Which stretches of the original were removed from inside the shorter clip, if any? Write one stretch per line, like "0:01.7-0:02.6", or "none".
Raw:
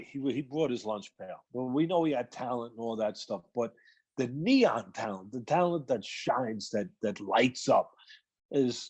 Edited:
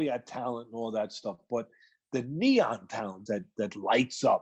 0:05.3-0:06.7